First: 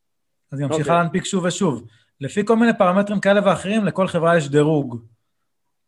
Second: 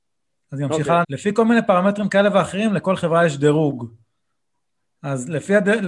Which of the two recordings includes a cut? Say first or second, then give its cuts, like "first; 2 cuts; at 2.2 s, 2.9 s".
second; 1 cut; at 1.0 s